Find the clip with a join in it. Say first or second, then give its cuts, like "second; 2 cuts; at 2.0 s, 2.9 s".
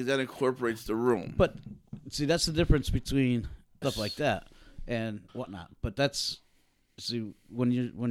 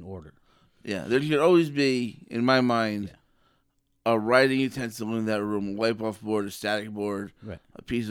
first; 2 cuts; at 3.8 s, 5.3 s